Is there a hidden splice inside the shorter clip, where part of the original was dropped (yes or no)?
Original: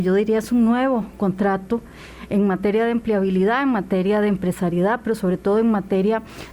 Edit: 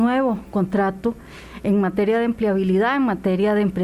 no